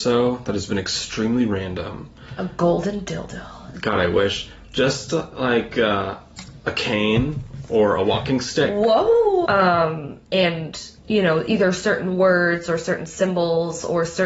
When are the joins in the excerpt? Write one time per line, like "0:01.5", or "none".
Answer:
0:09.5
0:11.0